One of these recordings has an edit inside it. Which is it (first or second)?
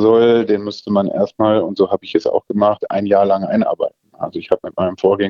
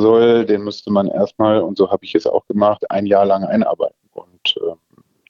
second